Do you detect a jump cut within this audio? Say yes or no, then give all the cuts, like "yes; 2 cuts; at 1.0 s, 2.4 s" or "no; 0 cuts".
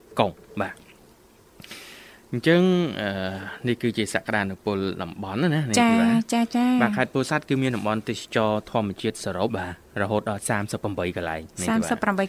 yes; 1 cut; at 9.5 s